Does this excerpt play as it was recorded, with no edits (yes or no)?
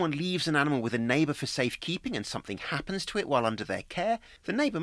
yes